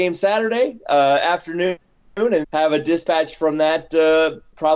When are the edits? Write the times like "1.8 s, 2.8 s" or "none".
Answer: 2.4 s